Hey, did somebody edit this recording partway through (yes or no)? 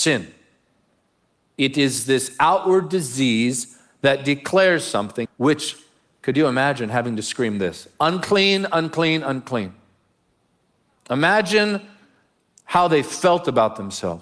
yes